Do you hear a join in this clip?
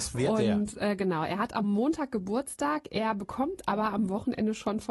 no; 0 cuts

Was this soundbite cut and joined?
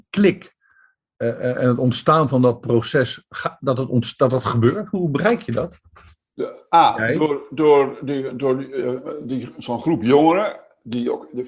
no; 0 cuts

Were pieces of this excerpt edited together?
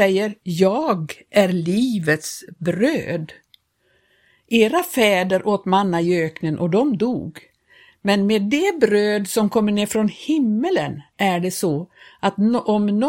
no; 0 cuts

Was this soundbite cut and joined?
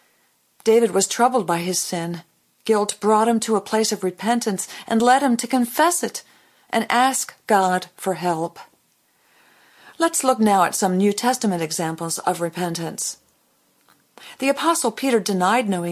no; 0 cuts

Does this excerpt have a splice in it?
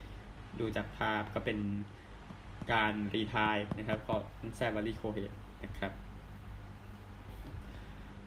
no; 0 cuts

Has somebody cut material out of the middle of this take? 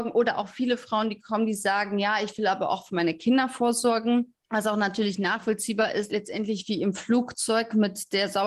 yes; 2 cuts; at 4.4 s, 6.1 s

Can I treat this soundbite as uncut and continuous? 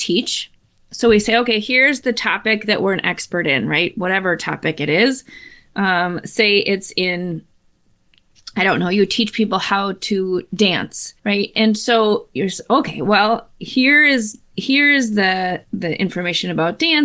no; 2 cuts; at 11.2 s, 15.6 s

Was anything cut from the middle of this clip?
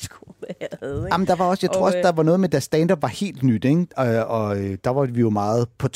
no; 0 cuts

